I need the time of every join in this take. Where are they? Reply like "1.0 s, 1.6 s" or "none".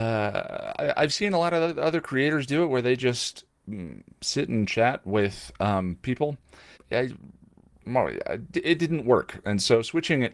6.7 s, 8.5 s